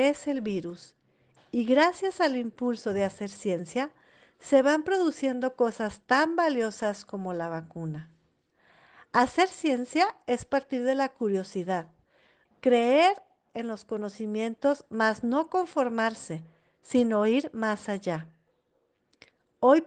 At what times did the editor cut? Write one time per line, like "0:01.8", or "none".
0:12.5